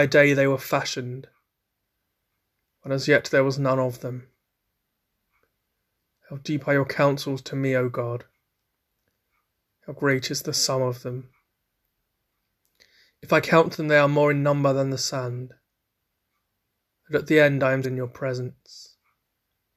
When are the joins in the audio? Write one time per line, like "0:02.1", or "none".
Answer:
0:17.8